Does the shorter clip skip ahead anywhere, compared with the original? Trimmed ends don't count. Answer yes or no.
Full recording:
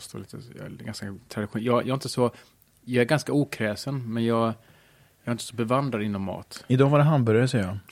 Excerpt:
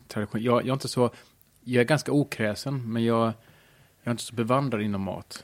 no